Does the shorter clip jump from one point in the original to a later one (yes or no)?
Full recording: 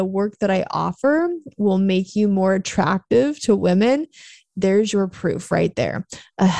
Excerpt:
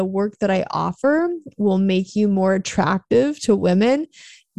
no